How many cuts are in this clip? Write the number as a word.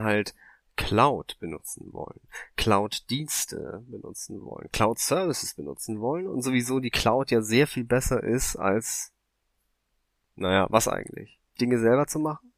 one